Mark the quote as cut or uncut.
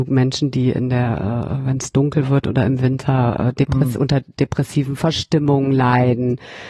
uncut